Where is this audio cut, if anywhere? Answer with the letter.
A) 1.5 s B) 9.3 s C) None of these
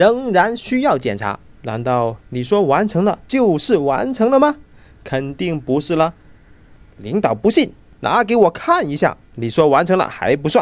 A